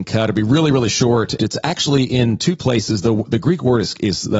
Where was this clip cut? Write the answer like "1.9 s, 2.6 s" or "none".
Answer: 1.4 s